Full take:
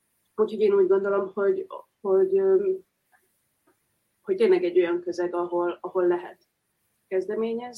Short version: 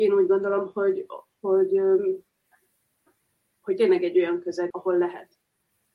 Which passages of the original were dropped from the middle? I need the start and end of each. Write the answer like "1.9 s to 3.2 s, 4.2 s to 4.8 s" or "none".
5.3 s to 5.8 s